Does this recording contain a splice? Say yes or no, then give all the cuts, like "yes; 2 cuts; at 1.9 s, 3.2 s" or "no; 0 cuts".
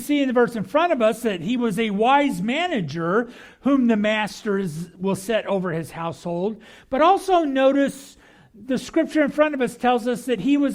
no; 0 cuts